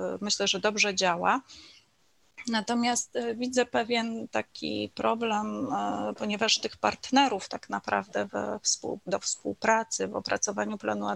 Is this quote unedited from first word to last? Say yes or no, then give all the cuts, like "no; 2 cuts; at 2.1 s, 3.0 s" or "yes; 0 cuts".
yes; 0 cuts